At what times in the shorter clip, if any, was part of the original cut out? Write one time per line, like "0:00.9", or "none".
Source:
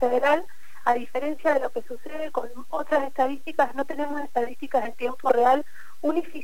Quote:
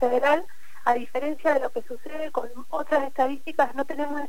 none